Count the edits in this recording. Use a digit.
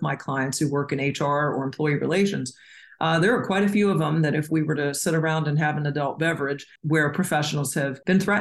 1